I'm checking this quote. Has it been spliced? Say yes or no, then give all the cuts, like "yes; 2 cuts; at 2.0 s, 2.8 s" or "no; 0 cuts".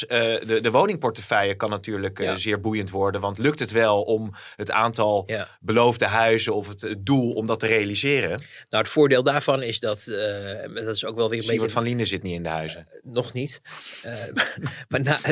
no; 0 cuts